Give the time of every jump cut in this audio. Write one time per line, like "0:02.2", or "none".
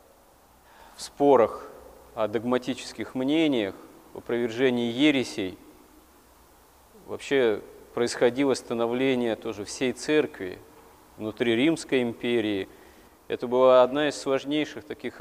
none